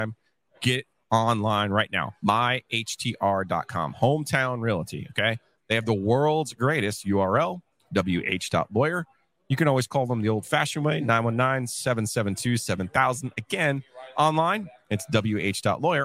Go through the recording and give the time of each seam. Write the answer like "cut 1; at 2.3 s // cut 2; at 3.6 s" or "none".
cut 1; at 5.6 s